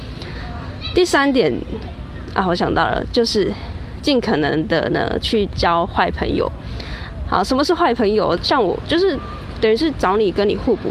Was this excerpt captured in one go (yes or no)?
no